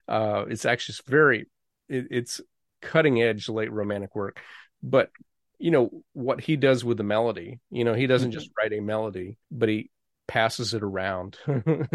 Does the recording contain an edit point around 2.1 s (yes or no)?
no